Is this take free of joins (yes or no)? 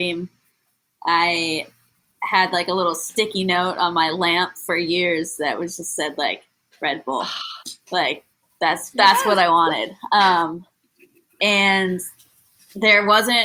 yes